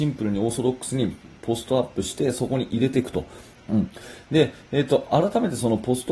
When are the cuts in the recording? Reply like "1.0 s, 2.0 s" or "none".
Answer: 3.5 s